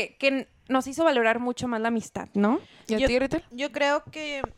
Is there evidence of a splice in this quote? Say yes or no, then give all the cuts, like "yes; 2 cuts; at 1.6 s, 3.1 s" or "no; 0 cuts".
no; 0 cuts